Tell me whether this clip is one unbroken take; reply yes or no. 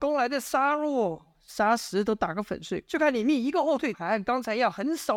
no